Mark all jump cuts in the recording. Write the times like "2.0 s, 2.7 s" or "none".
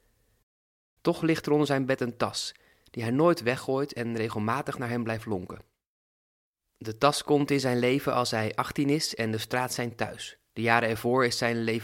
10.5 s